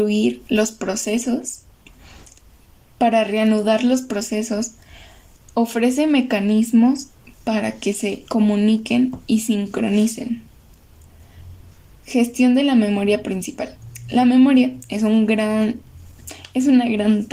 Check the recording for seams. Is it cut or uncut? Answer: uncut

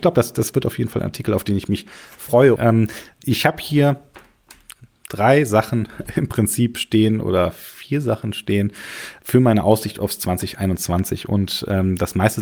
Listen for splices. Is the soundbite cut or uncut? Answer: cut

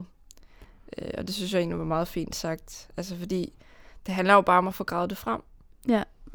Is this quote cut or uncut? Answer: uncut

